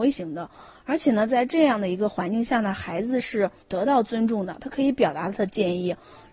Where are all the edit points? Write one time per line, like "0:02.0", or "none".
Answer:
0:03.6